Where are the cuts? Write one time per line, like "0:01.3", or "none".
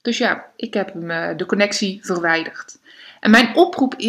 none